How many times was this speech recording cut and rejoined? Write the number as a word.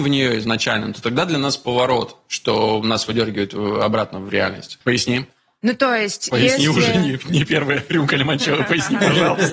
one